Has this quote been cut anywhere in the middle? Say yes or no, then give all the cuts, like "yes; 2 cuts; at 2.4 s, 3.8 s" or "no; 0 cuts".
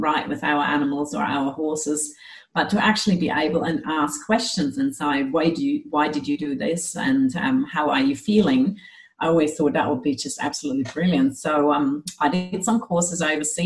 no; 0 cuts